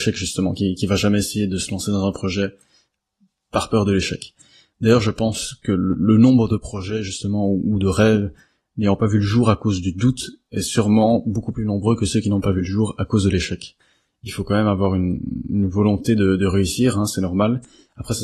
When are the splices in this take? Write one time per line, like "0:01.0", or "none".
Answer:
none